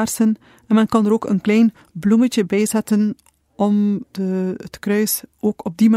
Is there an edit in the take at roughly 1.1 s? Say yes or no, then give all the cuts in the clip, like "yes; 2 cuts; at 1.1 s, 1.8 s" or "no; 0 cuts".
no; 1 cut; at 4.0 s